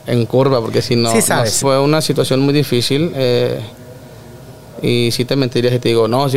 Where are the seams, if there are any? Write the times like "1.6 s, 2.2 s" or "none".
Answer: 1.6 s